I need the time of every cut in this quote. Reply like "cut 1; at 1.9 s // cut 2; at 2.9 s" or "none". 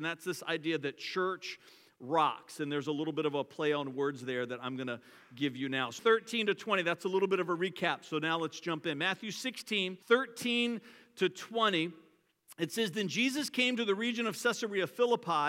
cut 1; at 6.0 s // cut 2; at 10.0 s

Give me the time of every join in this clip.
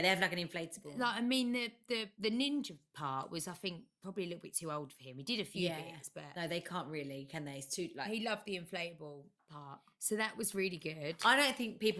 none

